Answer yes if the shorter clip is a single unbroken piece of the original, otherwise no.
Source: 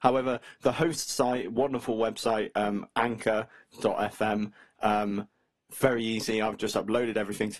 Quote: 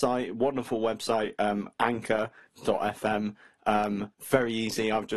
no